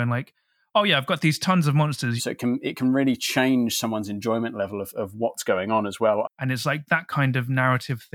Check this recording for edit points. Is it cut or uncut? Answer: cut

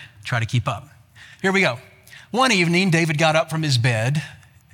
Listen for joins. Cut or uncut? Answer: uncut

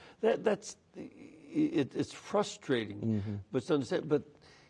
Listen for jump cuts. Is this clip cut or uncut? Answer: uncut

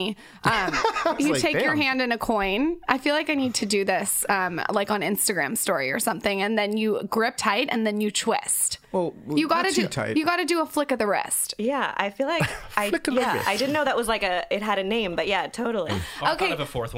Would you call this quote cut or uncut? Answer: cut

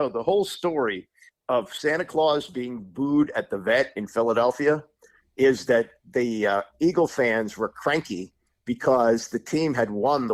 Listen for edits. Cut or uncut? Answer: uncut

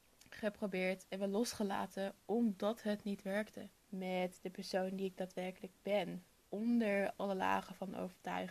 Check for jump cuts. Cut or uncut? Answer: cut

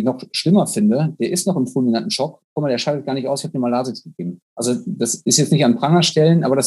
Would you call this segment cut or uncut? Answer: cut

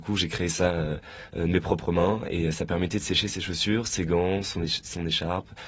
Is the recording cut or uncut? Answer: uncut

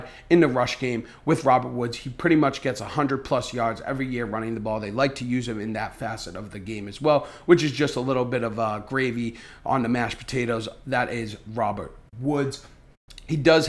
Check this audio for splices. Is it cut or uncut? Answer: uncut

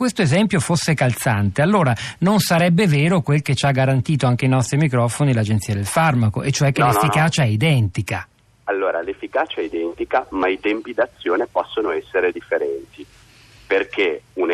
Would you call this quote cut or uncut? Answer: uncut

